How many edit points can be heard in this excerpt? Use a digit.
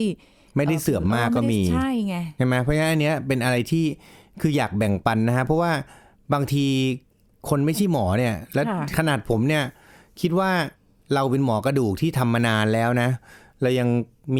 0